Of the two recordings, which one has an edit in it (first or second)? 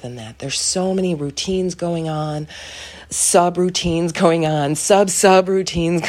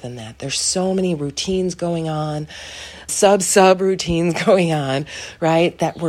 second